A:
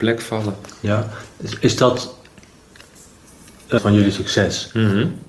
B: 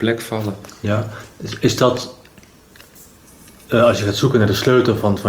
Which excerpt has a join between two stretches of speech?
A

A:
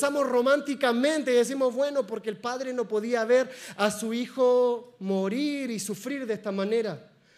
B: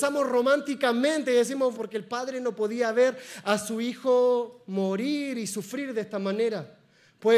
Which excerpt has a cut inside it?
B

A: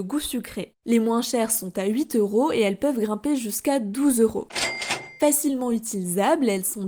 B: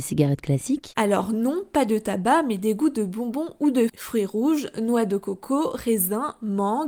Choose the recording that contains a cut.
B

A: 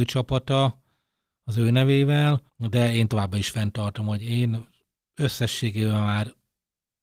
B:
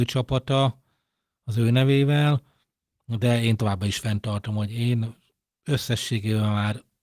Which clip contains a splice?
A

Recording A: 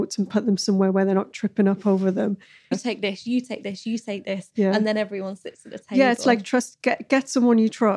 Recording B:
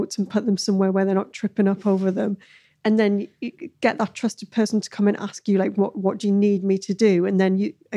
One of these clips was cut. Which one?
A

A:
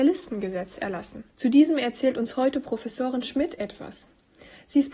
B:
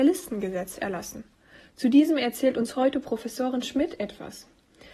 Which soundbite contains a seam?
A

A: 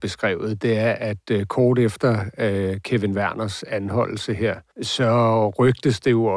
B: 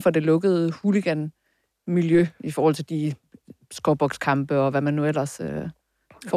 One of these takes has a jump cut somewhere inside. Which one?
A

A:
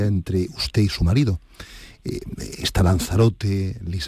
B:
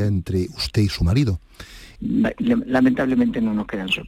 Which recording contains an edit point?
B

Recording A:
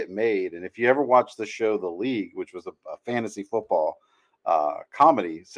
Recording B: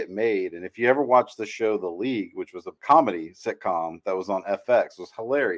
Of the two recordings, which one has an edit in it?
B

